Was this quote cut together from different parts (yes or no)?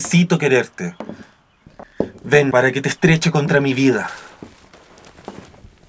yes